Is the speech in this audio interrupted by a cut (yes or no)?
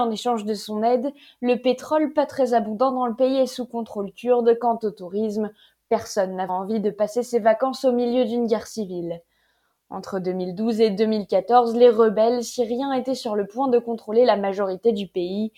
yes